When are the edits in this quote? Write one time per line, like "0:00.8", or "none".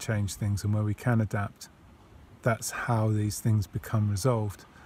0:02.3